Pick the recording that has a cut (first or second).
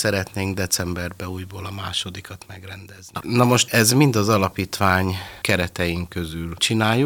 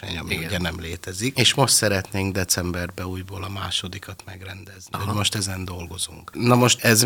first